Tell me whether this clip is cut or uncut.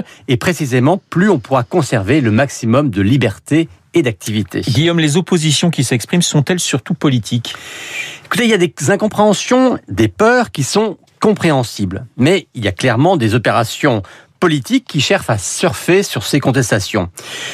uncut